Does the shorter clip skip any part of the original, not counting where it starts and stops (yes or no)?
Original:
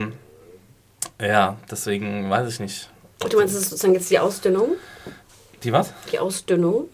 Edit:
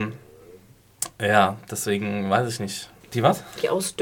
yes